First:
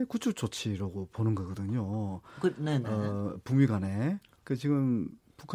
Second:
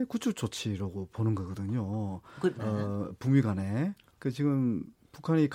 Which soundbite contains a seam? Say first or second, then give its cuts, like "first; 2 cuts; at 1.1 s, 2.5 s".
second; 1 cut; at 2.6 s